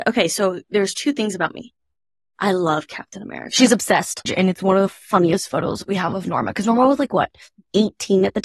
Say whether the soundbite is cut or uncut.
cut